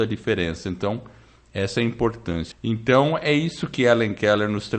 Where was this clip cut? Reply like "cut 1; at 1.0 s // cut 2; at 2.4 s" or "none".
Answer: cut 1; at 2.5 s